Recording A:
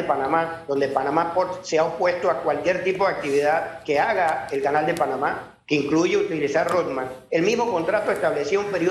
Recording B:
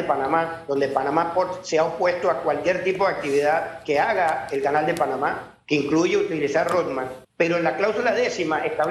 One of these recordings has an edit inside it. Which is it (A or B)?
B